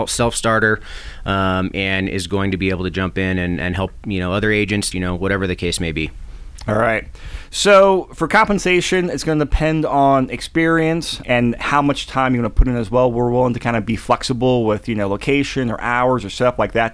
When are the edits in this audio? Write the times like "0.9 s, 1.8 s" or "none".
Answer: 4.9 s, 11.2 s